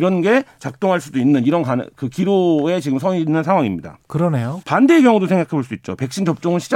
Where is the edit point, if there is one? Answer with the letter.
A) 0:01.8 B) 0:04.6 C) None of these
B